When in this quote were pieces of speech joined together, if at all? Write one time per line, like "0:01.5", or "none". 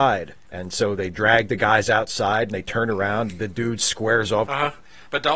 0:03.3
0:04.4